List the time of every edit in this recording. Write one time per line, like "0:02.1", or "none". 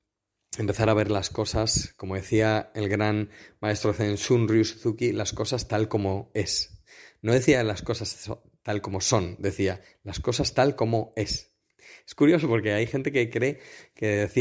none